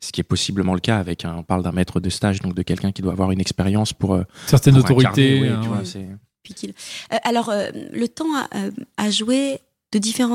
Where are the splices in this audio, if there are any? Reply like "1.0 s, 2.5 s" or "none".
none